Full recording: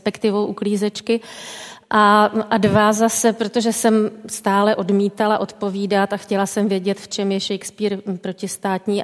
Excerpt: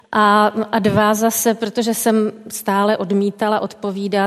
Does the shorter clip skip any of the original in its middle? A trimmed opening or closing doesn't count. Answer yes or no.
no